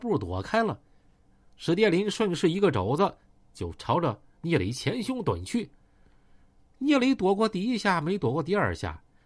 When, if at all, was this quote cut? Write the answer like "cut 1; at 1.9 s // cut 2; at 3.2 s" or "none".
none